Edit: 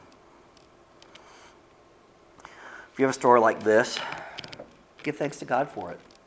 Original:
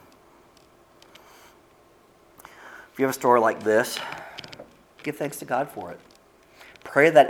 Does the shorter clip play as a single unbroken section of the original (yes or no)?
yes